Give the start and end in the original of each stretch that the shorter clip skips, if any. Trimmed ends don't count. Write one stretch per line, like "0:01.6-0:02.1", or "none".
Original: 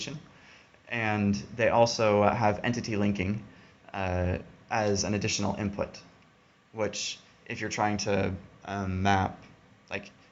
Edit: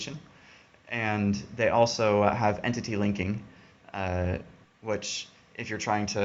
0:04.6-0:06.6